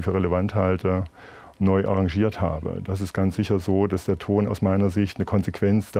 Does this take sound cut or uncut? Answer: uncut